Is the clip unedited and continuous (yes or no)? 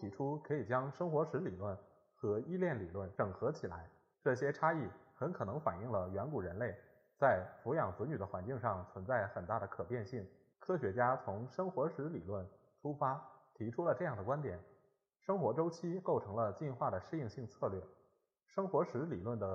no